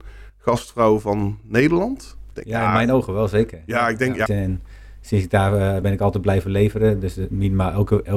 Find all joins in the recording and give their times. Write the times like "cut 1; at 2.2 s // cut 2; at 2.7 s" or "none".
cut 1; at 4.3 s // cut 2; at 5.8 s